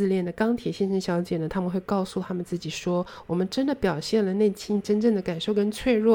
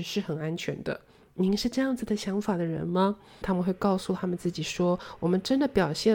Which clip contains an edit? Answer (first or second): second